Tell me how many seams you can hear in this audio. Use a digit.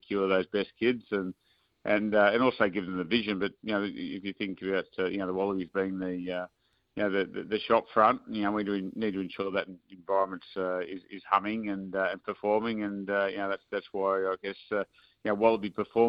0